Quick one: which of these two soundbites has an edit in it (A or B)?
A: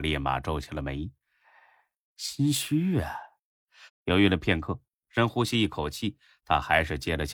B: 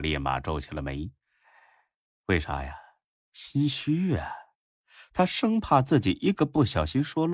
A